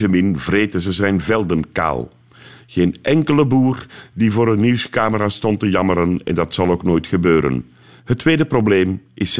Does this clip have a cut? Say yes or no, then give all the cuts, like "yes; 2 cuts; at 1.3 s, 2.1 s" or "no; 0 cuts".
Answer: yes; 1 cut; at 8.0 s